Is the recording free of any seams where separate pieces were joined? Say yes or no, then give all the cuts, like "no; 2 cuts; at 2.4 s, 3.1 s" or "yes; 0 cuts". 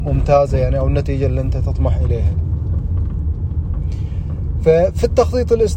yes; 0 cuts